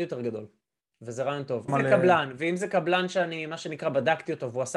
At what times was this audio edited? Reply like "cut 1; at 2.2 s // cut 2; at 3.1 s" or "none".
cut 1; at 1.7 s